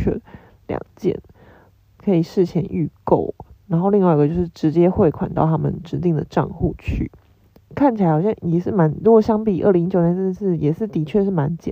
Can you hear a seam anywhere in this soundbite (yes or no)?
yes